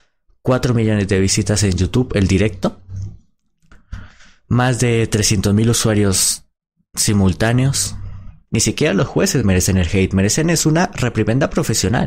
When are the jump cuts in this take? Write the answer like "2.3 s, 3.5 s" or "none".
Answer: 8.5 s